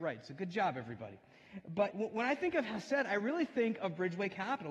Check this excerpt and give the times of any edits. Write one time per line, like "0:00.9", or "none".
0:01.9

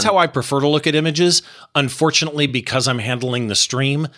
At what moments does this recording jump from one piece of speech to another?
none

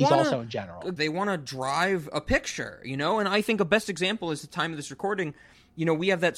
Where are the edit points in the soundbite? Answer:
0:01.0

